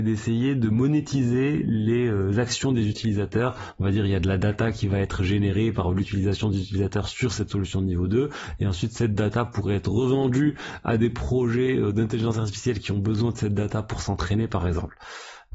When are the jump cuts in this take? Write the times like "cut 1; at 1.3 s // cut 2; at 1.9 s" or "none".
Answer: none